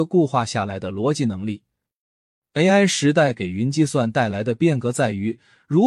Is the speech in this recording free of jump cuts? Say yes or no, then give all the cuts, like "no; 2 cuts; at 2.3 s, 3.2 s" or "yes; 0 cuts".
no; 1 cut; at 2.4 s